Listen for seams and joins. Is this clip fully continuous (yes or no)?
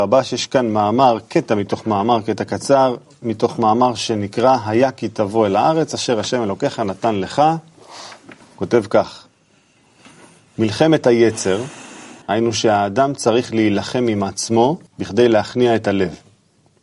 no